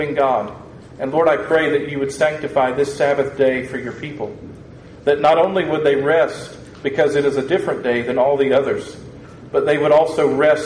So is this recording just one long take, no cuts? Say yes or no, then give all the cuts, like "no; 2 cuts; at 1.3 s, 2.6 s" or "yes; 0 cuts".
yes; 0 cuts